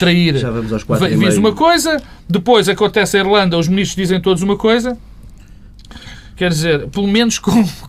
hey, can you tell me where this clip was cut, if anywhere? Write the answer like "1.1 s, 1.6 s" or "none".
6.4 s

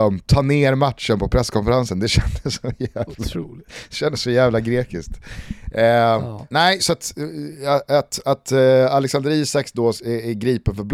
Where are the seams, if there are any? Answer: none

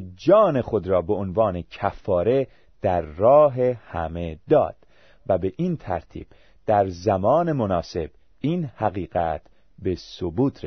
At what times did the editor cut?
none

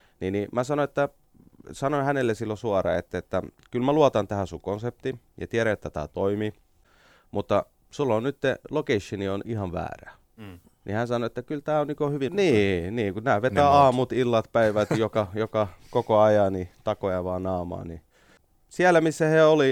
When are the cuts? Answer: 12.3 s

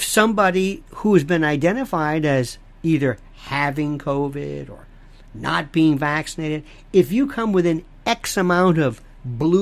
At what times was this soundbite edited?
none

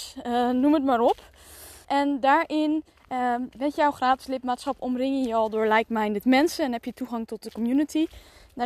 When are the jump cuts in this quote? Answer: 1.8 s

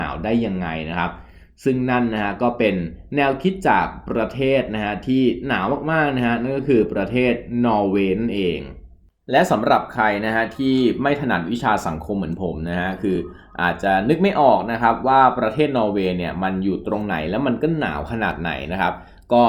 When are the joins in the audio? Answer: none

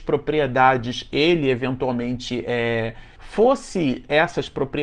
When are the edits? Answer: 3.2 s

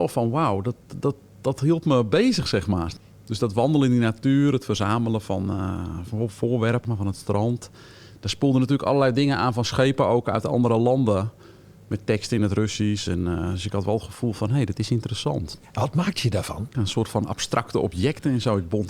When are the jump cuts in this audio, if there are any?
none

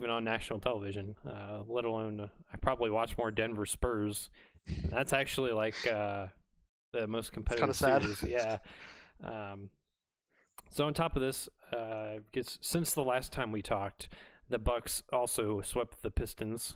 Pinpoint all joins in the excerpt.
none

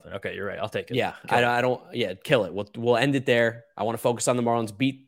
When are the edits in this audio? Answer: none

